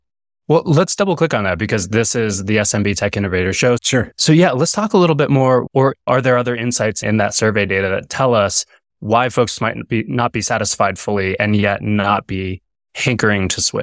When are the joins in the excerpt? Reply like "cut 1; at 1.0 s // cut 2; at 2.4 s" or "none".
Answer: cut 1; at 3.8 s // cut 2; at 5.7 s